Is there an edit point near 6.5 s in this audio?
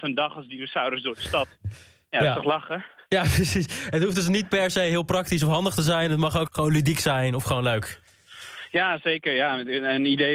yes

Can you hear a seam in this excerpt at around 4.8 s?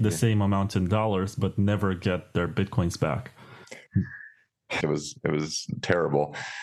yes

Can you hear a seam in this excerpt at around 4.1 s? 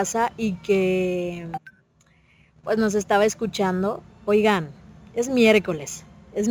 yes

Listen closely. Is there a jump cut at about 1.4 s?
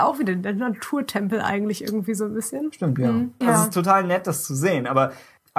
no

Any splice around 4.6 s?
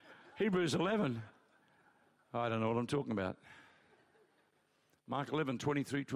no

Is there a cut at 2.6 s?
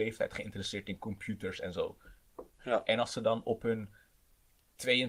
yes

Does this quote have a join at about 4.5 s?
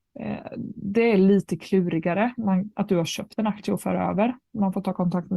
no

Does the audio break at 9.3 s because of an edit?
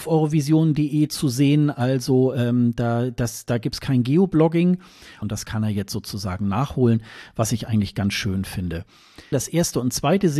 yes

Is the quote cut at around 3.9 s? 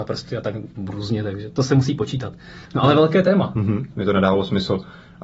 yes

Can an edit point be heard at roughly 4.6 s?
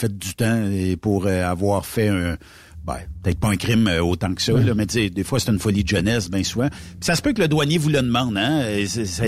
no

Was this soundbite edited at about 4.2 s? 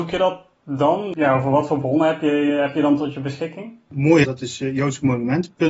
yes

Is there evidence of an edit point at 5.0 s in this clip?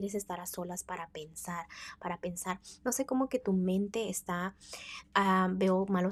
yes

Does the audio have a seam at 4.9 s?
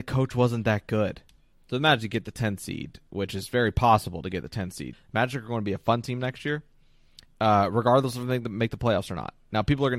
yes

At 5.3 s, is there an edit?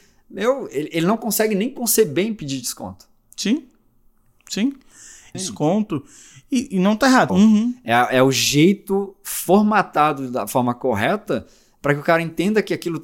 yes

